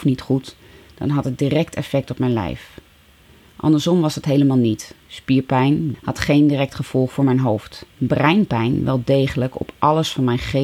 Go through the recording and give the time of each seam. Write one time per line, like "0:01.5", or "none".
0:05.9
0:07.9